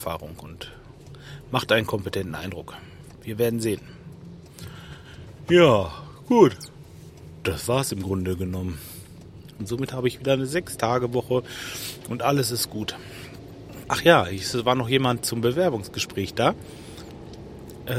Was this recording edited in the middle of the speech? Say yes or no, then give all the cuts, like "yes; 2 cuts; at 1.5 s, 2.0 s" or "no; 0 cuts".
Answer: yes; 3 cuts; at 9.6 s, 13.8 s, 15.2 s